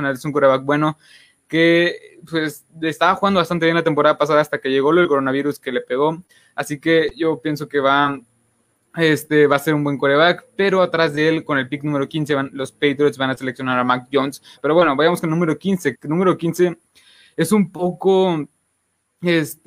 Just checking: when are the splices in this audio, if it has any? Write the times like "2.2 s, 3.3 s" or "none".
14.6 s, 15.9 s